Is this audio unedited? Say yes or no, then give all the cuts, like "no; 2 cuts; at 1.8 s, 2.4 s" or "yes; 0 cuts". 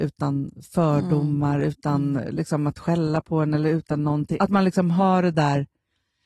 no; 1 cut; at 4.4 s